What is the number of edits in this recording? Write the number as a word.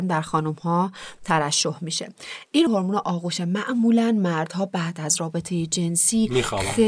one